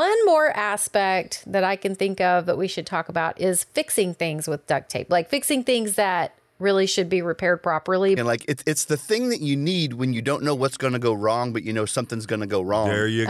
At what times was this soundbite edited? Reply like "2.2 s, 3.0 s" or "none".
8.2 s